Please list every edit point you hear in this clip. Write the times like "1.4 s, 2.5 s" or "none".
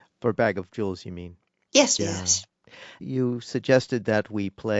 2.0 s

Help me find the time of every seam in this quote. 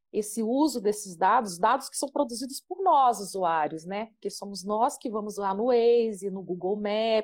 none

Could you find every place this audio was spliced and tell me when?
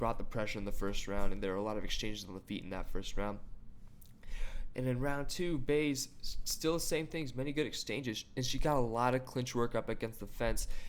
none

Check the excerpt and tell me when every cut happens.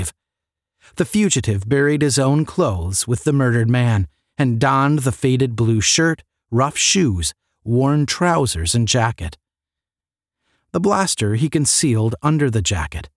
none

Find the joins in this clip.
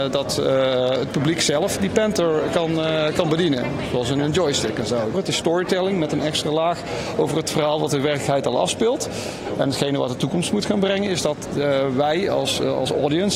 5.1 s

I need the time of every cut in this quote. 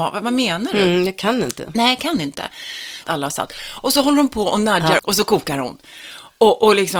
3.0 s, 5.0 s

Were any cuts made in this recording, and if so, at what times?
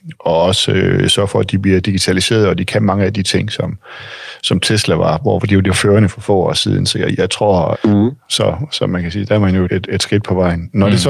7.7 s, 9.7 s

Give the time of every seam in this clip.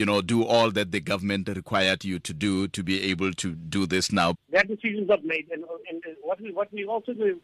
4.3 s, 5.8 s

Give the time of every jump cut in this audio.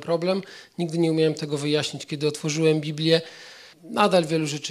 3.7 s

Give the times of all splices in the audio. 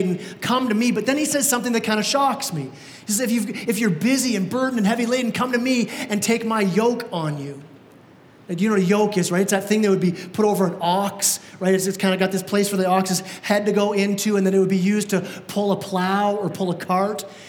none

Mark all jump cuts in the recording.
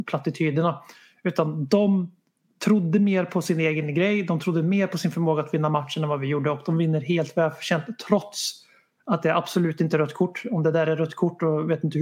none

